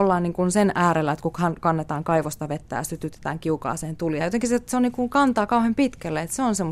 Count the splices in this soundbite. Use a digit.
1